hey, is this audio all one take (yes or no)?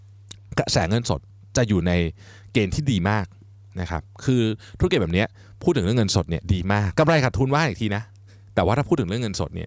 no